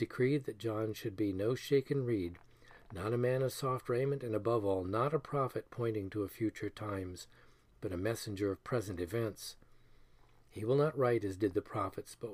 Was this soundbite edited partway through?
no; 0 cuts

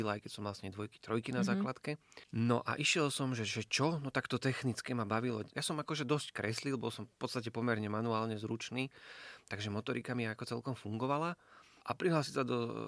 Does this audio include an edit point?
yes; 2 cuts; at 5.5 s, 11.8 s

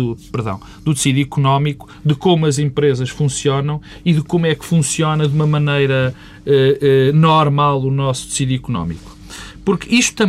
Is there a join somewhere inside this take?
no; 0 cuts

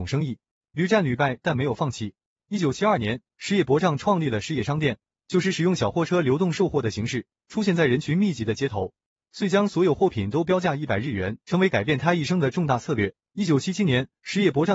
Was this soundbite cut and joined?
yes; 3 cuts; at 9.2 s, 11.4 s, 13.2 s

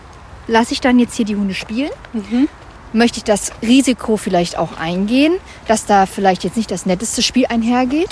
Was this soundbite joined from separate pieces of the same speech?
no; 0 cuts

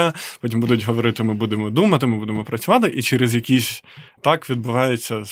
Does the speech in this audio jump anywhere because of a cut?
yes; 1 cut; at 4.2 s

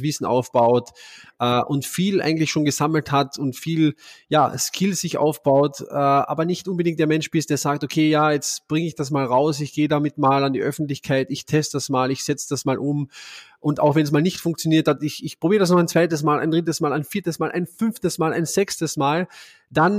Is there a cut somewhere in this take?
no; 0 cuts

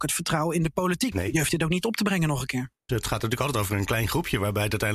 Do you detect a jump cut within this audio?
yes; 2 cuts; at 1.1 s, 2.9 s

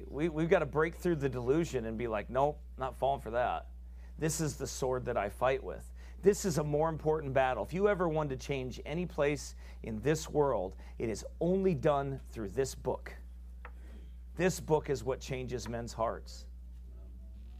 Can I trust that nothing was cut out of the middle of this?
no; 1 cut; at 14.3 s

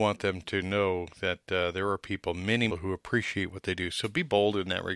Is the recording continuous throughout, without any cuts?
no; 1 cut; at 2.7 s

